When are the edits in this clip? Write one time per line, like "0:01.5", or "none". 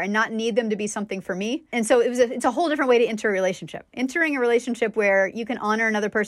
none